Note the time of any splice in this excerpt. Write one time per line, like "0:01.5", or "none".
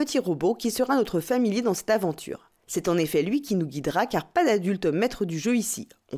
none